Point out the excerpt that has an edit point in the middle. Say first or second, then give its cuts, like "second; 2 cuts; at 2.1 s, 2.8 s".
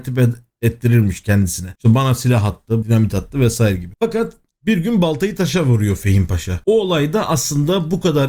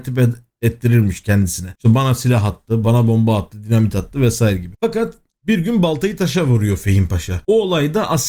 first; 1 cut; at 2.8 s